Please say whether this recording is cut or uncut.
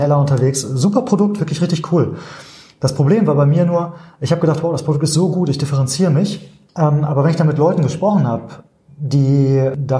uncut